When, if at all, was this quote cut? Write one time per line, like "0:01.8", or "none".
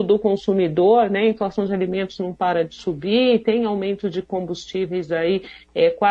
none